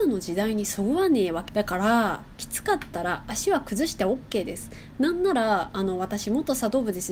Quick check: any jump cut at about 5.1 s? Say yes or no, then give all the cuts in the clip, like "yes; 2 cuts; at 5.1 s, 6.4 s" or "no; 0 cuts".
no; 1 cut; at 1.5 s